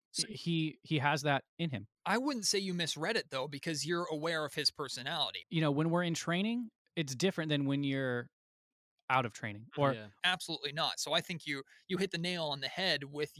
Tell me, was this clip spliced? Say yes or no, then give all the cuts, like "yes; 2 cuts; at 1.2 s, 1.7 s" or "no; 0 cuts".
yes; 2 cuts; at 5.4 s, 10.2 s